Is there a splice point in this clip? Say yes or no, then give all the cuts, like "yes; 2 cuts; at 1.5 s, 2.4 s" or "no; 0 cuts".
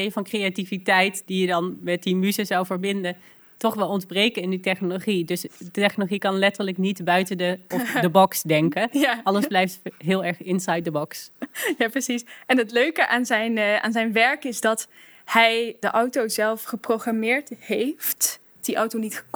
yes; 1 cut; at 7.7 s